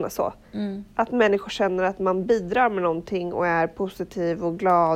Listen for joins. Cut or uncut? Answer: uncut